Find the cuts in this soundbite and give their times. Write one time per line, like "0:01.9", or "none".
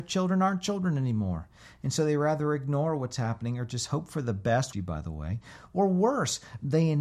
0:04.7